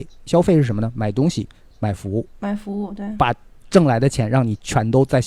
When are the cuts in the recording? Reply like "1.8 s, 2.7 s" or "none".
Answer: 2.3 s